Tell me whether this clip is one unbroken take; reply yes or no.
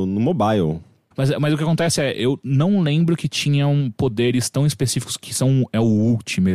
no